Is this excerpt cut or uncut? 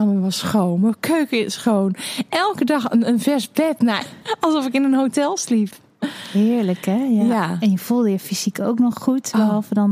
cut